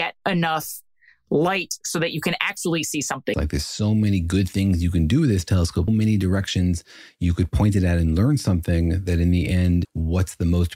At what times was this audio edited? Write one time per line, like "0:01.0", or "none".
0:03.3
0:05.9
0:09.8